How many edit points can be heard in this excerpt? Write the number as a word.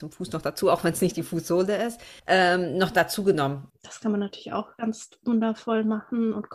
two